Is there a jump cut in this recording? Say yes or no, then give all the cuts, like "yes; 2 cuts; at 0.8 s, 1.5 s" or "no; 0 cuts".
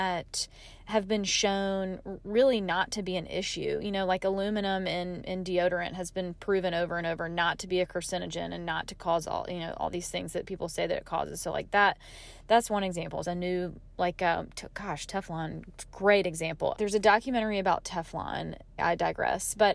yes; 3 cuts; at 13.2 s, 16.7 s, 18.8 s